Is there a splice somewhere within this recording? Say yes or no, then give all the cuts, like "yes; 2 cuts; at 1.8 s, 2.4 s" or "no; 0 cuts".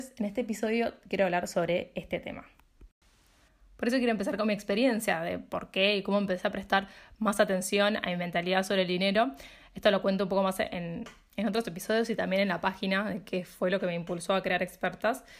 no; 0 cuts